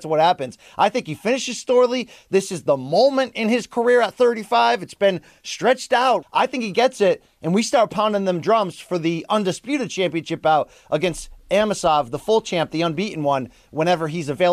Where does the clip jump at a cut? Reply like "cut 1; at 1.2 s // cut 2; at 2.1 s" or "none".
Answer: cut 1; at 6.2 s